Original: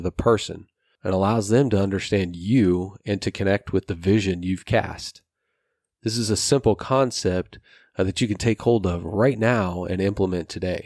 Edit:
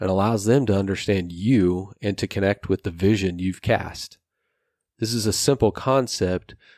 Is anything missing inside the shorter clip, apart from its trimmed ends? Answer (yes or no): no